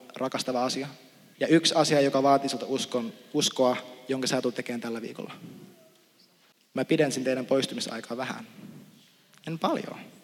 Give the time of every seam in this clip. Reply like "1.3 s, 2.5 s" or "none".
1.3 s